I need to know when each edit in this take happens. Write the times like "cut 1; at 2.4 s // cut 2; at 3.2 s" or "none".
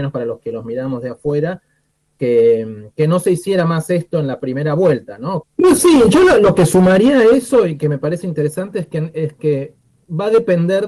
cut 1; at 5.4 s